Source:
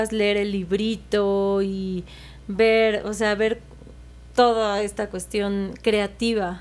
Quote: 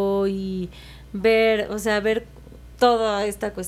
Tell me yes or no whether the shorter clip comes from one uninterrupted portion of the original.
no